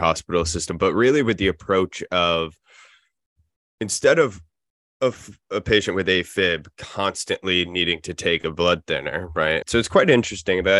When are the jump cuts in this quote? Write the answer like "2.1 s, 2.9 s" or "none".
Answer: 9.6 s